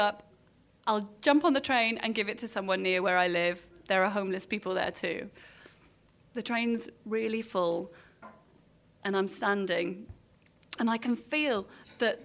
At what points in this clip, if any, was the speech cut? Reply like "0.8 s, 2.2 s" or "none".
none